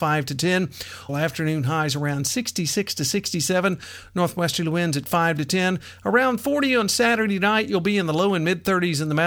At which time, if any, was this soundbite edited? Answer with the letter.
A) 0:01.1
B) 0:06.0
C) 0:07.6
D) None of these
A